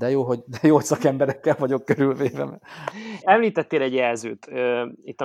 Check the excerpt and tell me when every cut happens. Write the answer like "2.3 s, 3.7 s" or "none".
3.2 s